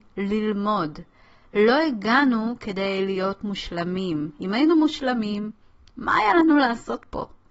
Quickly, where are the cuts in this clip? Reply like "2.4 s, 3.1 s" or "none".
none